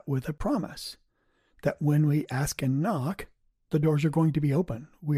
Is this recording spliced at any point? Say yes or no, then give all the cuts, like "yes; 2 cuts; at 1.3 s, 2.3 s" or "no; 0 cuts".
yes; 1 cut; at 2.6 s